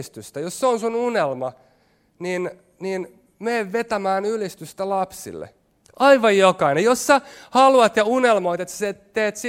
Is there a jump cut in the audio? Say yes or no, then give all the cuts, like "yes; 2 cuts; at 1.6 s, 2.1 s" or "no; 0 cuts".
yes; 1 cut; at 5.8 s